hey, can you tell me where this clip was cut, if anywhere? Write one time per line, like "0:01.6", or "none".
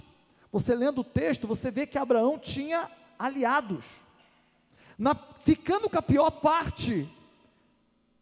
none